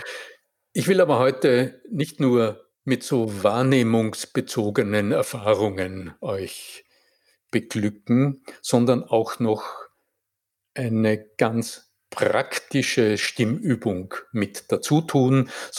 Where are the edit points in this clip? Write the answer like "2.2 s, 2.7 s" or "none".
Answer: 2.7 s

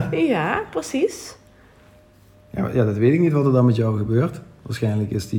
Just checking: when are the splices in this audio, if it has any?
none

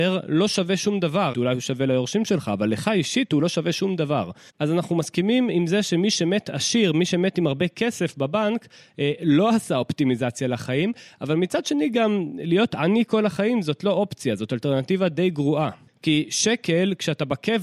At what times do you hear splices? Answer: 1.3 s, 4.5 s, 15.9 s

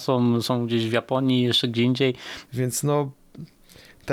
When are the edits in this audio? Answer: 2.4 s

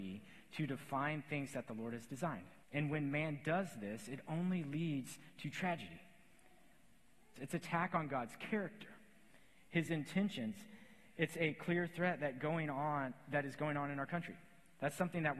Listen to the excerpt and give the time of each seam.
2.6 s, 7.4 s

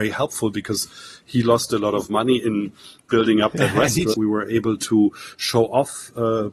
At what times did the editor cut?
4.1 s

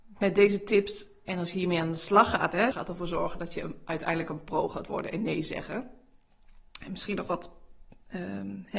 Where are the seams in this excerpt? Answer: 2.7 s

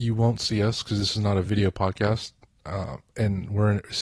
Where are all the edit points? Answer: none

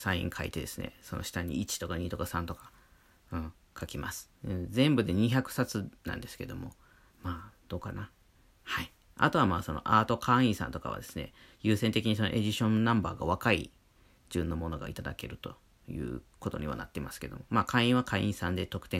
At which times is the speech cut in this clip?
8.5 s

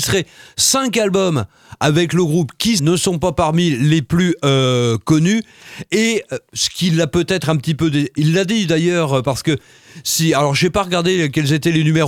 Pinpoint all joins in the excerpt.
2.8 s

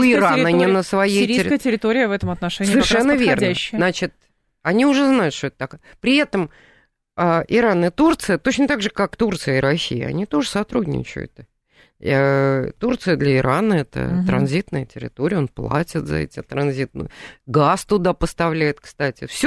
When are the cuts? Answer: none

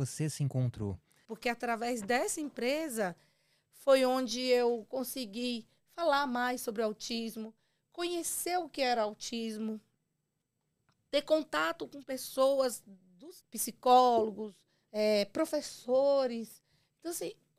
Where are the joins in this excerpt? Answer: 1.2 s, 13.4 s, 14.9 s

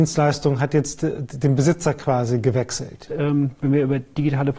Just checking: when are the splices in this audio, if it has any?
3.1 s

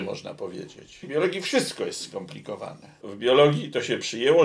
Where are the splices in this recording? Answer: 1.0 s, 3.0 s

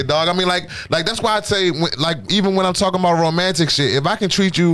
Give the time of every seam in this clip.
none

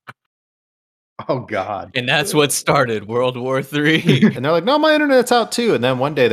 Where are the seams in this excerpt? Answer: 4.3 s

